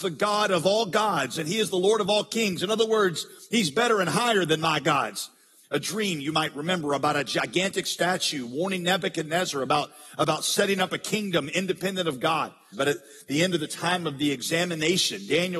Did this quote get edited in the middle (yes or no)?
yes